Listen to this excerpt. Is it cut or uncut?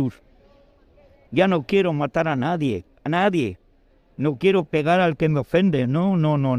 cut